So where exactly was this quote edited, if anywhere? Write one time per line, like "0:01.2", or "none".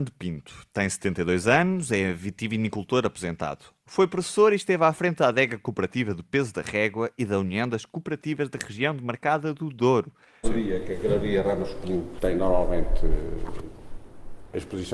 0:10.4